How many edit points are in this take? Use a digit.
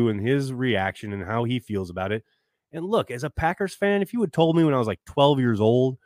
0